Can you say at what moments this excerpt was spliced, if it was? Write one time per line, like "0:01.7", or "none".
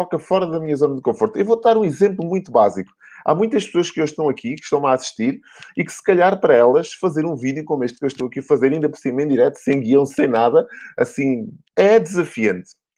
0:11.6